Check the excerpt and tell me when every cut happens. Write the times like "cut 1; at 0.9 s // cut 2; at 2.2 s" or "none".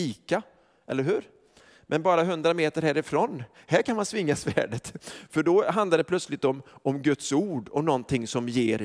none

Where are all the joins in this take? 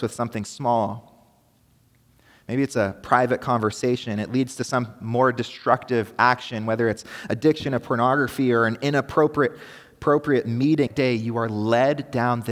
cut 1; at 2.4 s // cut 2; at 10.9 s

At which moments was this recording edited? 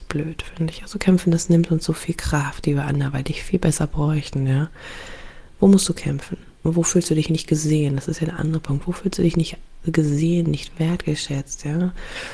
cut 1; at 6.6 s

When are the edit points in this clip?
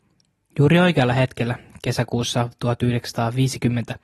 none

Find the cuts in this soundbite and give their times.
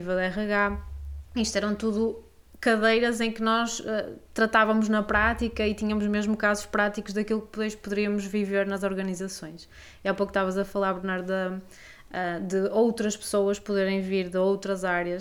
none

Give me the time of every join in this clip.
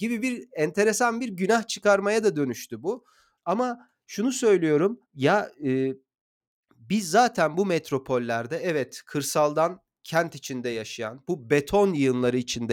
cut 1; at 3.4 s // cut 2; at 5.0 s

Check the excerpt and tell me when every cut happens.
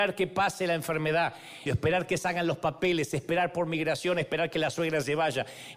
cut 1; at 1.7 s

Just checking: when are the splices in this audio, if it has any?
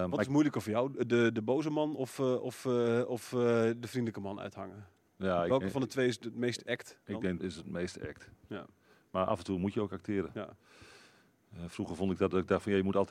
cut 1; at 7.4 s

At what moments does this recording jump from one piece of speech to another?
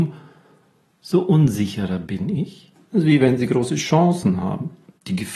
cut 1; at 2.8 s

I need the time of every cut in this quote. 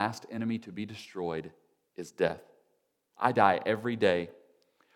cut 1; at 3.1 s

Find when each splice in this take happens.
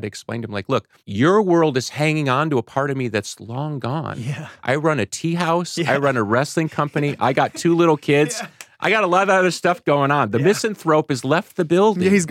cut 1; at 1.0 s

